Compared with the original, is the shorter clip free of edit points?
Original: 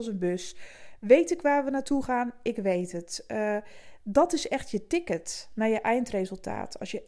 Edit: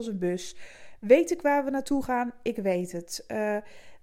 yes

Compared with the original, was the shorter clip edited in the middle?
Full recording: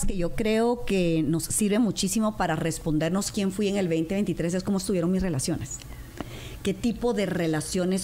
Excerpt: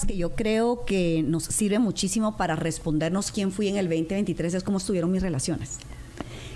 no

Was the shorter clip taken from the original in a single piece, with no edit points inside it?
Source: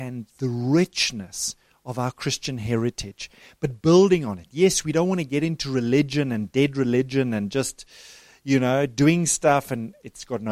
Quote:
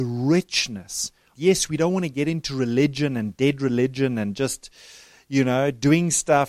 no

